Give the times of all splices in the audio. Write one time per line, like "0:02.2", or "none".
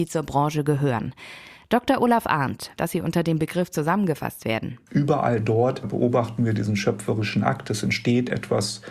0:02.8
0:04.9

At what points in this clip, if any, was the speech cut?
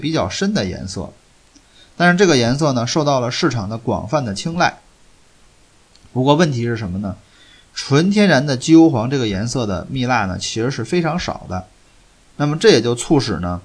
none

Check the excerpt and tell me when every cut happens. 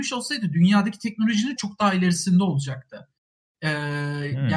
0:01.6

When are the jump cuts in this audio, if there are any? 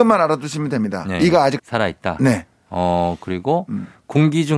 0:01.6

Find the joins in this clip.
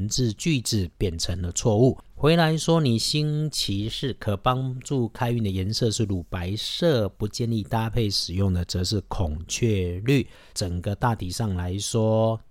0:02.1
0:10.5

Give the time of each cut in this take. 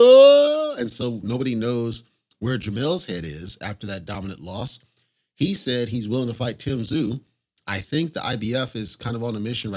none

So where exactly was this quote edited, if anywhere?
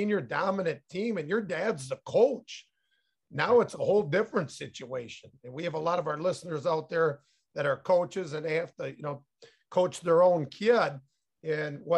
none

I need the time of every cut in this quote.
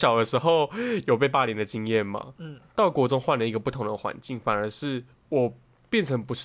none

